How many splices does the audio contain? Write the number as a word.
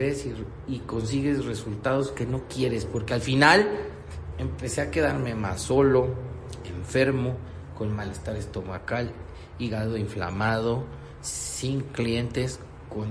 one